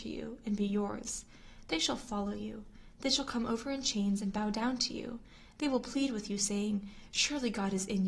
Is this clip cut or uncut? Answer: uncut